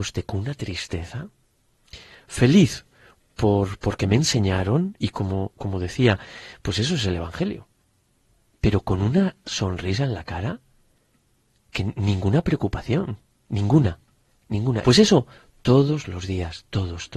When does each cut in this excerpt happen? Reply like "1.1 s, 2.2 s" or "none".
8.5 s, 14.8 s